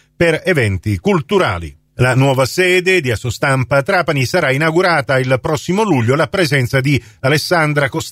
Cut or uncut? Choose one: uncut